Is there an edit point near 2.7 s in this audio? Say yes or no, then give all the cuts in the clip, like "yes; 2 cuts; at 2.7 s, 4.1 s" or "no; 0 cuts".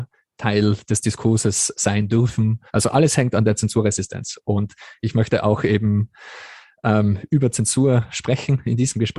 yes; 1 cut; at 2.7 s